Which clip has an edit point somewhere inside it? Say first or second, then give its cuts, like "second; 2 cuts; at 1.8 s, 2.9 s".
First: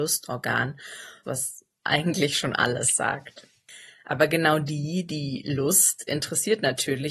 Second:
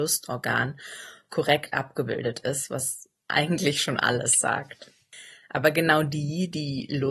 first; 1 cut; at 1.2 s